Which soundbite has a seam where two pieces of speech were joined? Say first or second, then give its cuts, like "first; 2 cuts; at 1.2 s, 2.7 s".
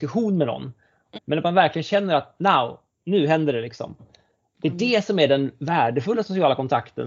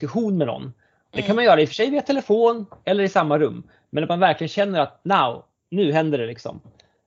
first; 1 cut; at 1.2 s